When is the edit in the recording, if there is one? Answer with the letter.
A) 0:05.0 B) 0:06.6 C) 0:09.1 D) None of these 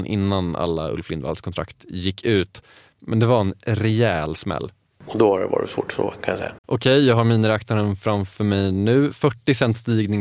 B